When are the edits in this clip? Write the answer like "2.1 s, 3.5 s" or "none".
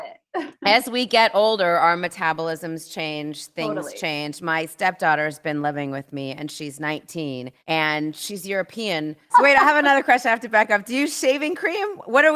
7.6 s, 9.3 s